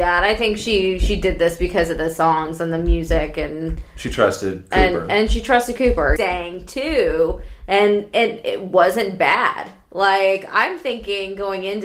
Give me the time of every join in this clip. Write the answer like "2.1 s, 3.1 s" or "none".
6.2 s